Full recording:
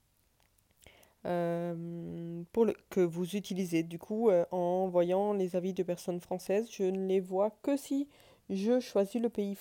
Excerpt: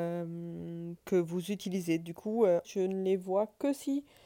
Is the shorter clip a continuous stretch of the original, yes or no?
no